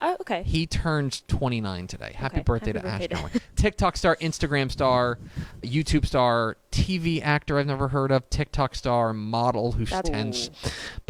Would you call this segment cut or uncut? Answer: cut